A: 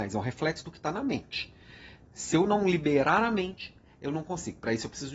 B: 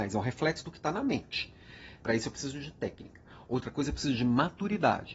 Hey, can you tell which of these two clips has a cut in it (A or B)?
B